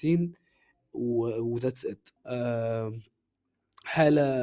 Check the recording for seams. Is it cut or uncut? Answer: cut